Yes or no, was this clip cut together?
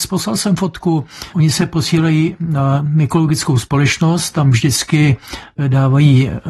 yes